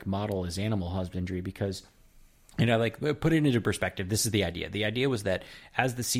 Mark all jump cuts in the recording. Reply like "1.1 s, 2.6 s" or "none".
none